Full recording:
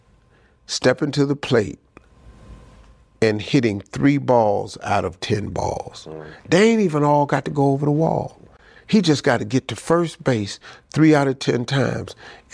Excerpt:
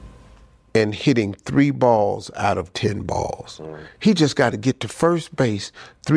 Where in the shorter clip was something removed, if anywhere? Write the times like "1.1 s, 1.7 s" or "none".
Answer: 3.9 s